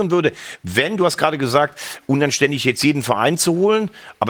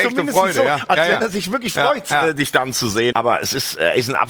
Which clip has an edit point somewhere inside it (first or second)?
second